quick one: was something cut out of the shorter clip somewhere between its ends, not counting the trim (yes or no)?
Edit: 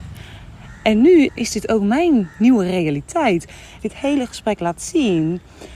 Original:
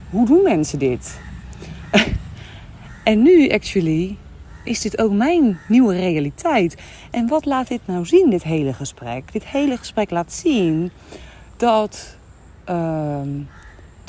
yes